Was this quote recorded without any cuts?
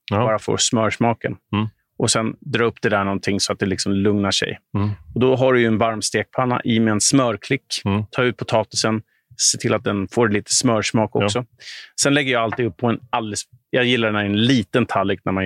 no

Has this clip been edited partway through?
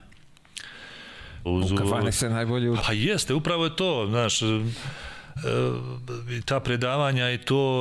yes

